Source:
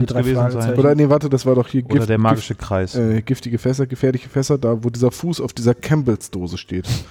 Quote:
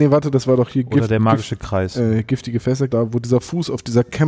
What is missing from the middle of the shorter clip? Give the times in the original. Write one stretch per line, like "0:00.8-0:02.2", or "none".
0:03.9-0:04.6